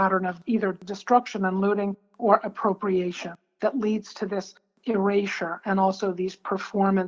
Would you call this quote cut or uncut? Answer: uncut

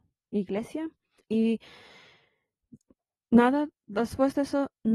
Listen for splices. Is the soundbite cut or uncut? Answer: cut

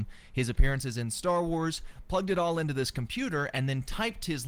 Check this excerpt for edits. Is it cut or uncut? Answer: uncut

